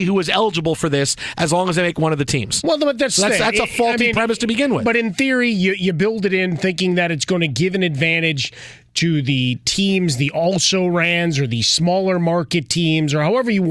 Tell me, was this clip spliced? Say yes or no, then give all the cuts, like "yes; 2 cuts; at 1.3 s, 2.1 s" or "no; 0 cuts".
no; 0 cuts